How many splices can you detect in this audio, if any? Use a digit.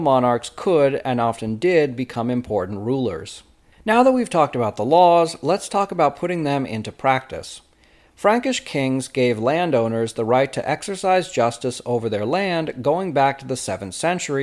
1